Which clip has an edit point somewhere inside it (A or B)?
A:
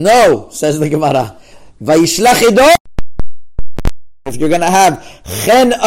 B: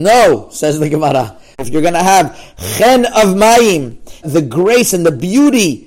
B